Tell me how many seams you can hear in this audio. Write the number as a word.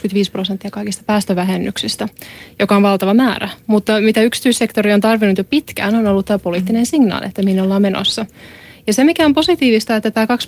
zero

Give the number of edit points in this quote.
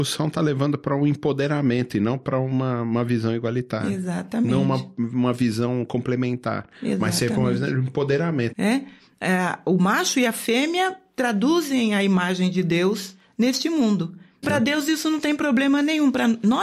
two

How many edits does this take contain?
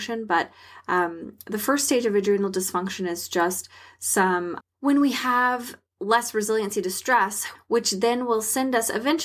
two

